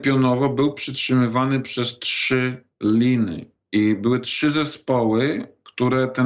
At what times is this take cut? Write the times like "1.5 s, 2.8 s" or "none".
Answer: none